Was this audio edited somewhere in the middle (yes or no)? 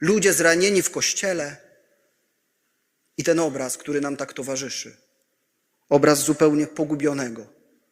no